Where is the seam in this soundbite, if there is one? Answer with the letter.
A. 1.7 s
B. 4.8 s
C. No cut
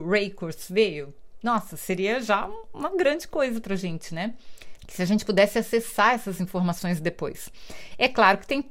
B